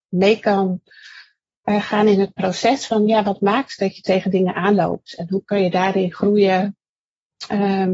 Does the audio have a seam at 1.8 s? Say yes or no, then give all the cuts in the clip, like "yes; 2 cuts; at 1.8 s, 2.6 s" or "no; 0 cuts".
no; 0 cuts